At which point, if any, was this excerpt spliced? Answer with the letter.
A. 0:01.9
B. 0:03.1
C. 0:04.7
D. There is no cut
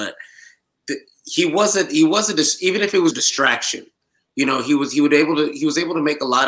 B